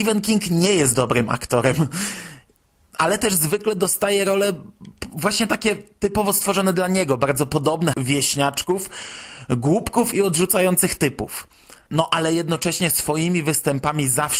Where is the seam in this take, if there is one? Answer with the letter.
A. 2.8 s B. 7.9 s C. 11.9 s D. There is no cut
B